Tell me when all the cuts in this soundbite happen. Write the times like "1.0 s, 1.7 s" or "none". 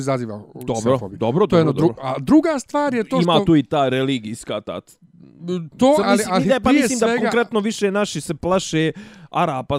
6.0 s